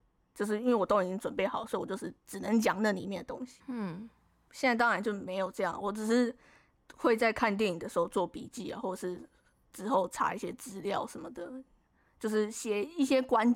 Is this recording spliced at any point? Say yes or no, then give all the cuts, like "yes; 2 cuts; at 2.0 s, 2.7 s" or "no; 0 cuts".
no; 0 cuts